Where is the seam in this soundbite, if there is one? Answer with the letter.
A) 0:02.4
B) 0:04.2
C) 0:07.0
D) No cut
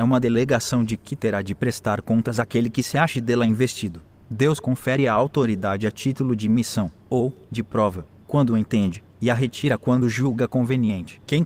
B